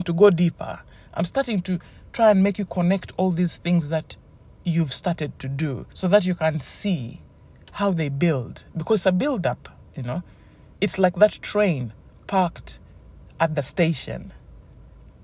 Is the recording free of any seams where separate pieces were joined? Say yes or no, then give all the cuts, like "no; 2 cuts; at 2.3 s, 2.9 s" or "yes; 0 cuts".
no; 1 cut; at 5.9 s